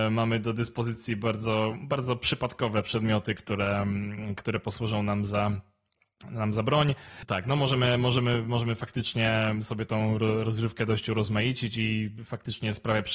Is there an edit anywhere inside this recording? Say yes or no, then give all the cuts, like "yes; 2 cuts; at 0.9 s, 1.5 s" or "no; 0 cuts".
no; 0 cuts